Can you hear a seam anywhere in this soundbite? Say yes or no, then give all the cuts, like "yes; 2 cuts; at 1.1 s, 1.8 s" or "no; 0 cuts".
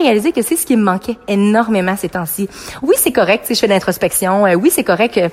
no; 0 cuts